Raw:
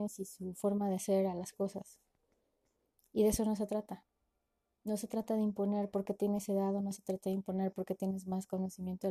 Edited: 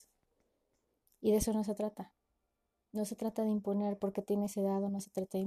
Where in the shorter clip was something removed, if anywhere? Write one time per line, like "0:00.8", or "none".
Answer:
none